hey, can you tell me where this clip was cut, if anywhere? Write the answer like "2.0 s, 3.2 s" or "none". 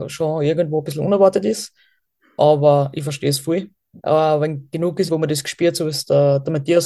4.0 s, 5.1 s